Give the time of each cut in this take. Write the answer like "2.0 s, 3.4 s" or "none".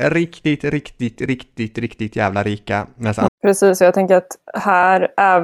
3.3 s